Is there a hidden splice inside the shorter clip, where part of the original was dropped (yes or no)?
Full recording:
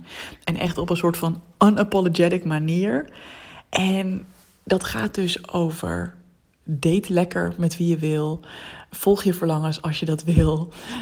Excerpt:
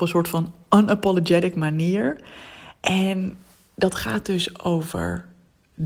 no